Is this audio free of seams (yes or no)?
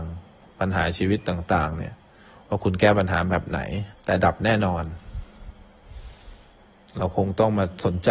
no